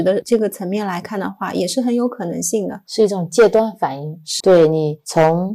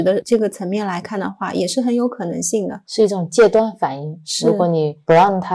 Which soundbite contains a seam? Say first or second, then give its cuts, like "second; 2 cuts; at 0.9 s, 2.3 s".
first; 1 cut; at 4.4 s